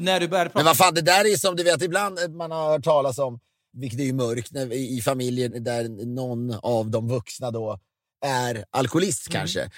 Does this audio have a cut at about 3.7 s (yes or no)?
yes